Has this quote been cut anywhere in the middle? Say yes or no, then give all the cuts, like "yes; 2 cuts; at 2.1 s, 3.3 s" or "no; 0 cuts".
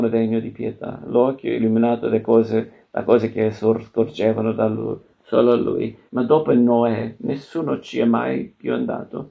yes; 1 cut; at 6.1 s